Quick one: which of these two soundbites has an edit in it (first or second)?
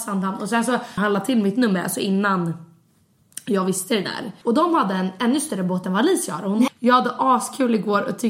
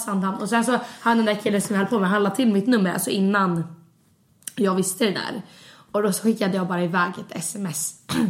first